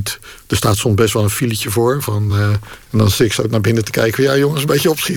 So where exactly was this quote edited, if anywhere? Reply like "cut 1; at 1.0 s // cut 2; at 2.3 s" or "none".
none